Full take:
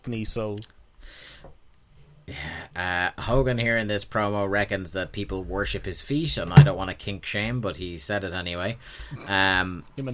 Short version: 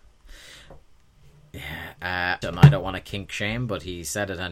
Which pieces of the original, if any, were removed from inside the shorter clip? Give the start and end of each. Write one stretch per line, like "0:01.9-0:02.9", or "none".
0:03.2-0:06.4